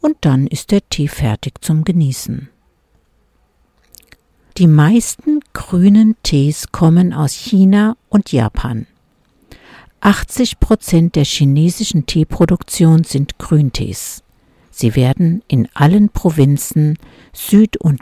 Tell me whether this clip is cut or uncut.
cut